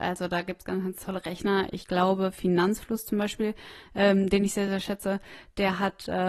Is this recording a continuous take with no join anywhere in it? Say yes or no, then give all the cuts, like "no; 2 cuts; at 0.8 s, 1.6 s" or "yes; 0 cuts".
yes; 0 cuts